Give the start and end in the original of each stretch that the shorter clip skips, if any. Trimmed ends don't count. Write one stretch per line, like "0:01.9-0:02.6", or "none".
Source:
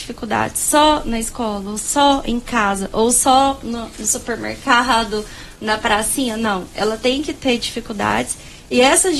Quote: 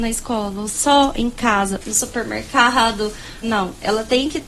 0:02.9-0:03.9
0:05.5-0:06.4